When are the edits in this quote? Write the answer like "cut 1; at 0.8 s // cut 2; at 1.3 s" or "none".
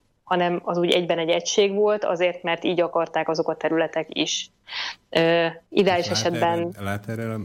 cut 1; at 5.6 s